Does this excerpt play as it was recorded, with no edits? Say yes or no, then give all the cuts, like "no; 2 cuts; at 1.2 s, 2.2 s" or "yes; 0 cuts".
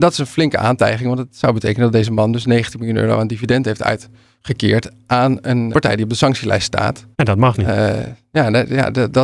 no; 2 cuts; at 5.7 s, 7.1 s